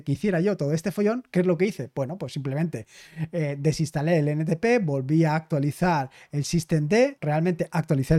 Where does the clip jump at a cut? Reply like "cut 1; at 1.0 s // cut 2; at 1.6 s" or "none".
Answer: cut 1; at 7.2 s